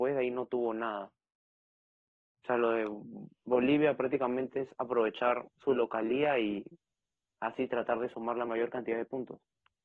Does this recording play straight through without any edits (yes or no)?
yes